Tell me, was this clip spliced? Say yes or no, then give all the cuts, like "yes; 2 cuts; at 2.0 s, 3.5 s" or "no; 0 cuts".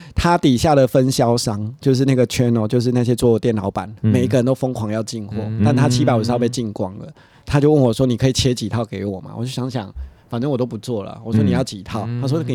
yes; 1 cut; at 7.4 s